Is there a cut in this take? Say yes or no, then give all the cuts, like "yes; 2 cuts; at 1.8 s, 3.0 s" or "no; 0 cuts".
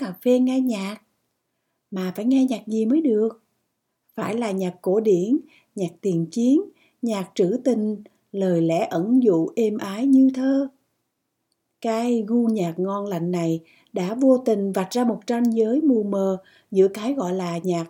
no; 0 cuts